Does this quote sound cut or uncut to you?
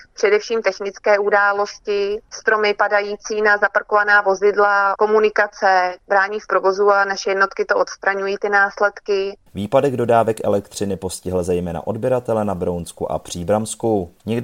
cut